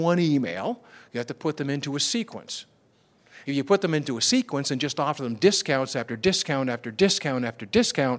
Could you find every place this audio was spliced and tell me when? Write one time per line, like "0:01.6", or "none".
0:03.4